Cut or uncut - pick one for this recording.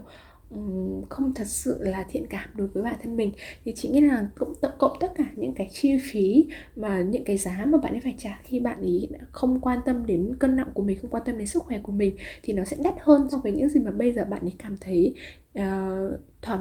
cut